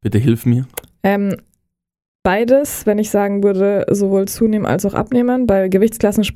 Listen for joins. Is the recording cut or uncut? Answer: uncut